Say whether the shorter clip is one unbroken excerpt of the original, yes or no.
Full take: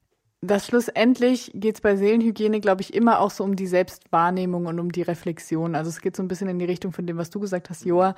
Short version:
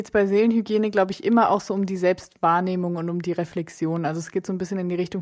yes